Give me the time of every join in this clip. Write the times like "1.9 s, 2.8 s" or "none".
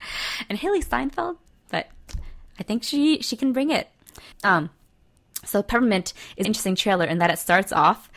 4.3 s, 6.4 s